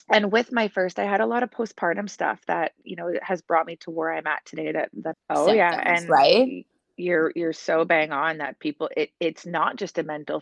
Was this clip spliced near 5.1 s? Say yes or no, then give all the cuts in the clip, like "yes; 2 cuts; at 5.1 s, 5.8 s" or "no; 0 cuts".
yes; 1 cut; at 5.1 s